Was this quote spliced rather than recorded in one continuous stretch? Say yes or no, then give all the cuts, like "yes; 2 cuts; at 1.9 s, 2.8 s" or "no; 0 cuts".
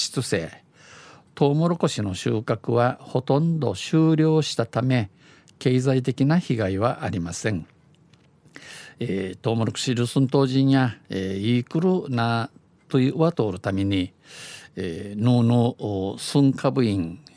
no; 0 cuts